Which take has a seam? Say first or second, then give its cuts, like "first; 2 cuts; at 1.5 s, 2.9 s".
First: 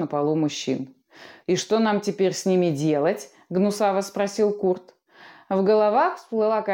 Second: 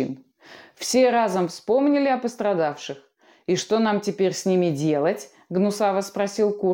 first; 1 cut; at 1.4 s